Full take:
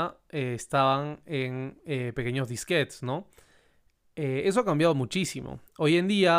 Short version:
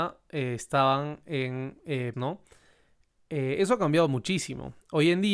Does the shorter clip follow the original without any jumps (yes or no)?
no